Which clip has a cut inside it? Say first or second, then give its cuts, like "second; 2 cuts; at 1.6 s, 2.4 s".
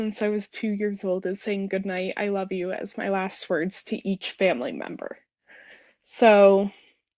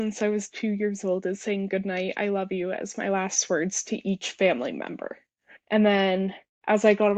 second; 1 cut; at 5.6 s